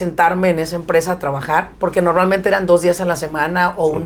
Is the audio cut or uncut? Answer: cut